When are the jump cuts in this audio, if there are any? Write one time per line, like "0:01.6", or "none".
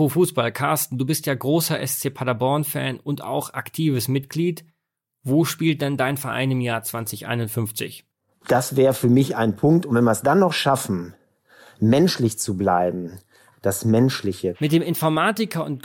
0:08.3
0:13.5
0:14.5